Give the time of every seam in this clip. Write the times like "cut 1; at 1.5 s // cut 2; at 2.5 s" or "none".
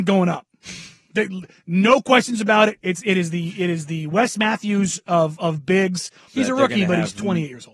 cut 1; at 6.3 s

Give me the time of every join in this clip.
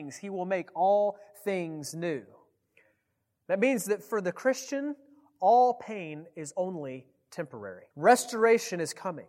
cut 1; at 7.9 s

